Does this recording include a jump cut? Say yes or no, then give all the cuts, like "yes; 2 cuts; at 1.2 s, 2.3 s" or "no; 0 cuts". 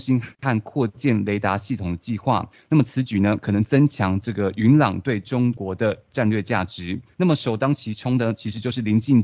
yes; 1 cut; at 7.1 s